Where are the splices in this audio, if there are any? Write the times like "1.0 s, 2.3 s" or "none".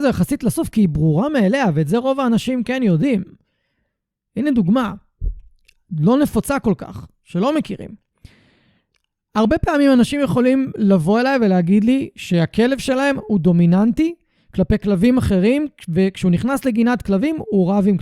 none